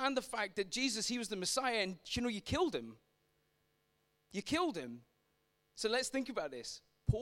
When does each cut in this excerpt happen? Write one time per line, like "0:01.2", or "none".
0:05.6